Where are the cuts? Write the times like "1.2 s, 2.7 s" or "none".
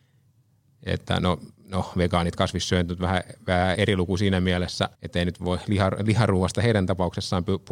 3.7 s, 4.9 s